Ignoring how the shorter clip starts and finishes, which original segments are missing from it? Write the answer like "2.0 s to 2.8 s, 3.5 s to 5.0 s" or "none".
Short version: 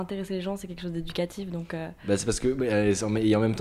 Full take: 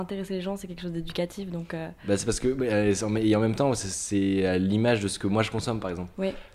none